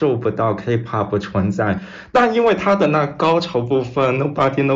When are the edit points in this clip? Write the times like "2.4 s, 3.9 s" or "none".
2.1 s